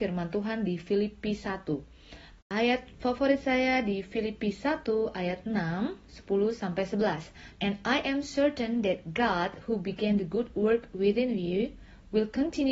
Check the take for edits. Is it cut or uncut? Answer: cut